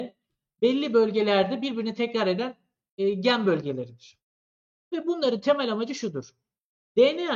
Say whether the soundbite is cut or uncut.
uncut